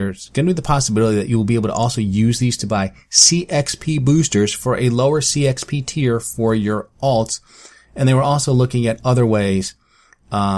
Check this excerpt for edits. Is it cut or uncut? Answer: uncut